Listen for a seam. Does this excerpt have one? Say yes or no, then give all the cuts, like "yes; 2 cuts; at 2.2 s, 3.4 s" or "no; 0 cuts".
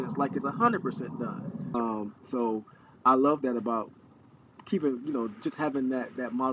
yes; 1 cut; at 1.7 s